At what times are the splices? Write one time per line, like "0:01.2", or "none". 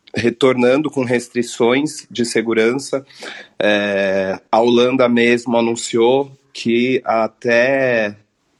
none

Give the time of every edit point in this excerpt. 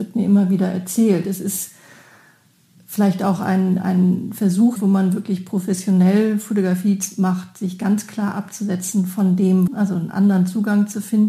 0:01.2
0:04.8
0:09.7

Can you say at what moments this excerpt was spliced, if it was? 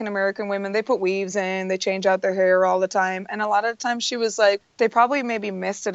0:04.6

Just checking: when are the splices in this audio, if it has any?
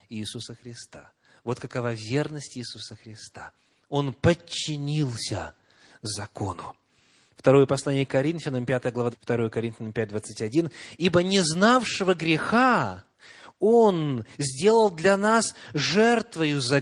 0:09.1

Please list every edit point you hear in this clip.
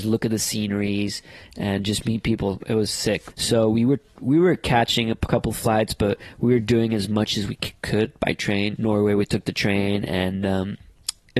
0:03.3
0:08.8

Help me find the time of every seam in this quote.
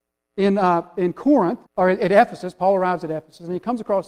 0:01.7

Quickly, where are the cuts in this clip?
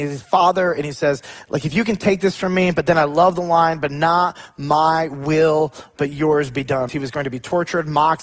0:06.9

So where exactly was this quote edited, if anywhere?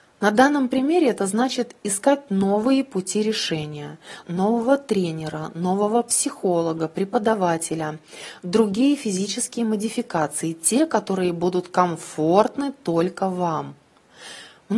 0:04.2

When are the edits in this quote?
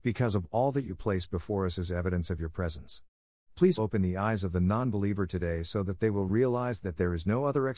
0:03.8

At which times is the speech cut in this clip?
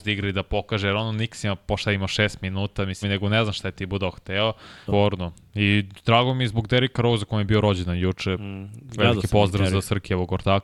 0:03.0
0:04.9

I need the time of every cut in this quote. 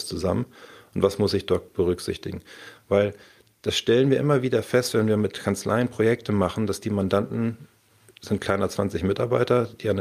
none

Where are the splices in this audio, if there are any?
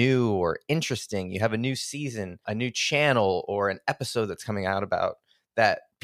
0:02.4

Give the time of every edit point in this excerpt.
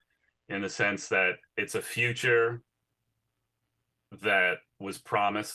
none

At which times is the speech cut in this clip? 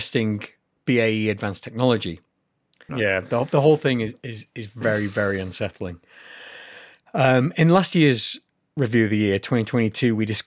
0:02.9

